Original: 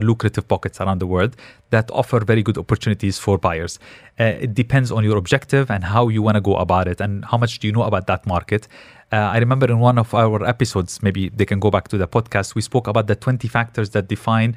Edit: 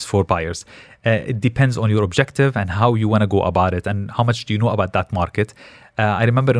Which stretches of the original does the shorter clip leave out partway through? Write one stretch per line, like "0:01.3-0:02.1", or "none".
none